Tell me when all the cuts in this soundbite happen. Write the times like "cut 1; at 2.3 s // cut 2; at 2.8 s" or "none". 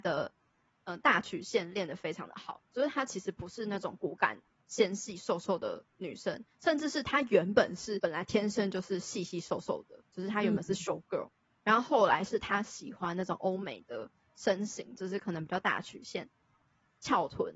none